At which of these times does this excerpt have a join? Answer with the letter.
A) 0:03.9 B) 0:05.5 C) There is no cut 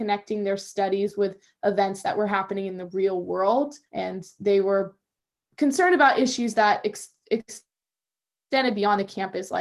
A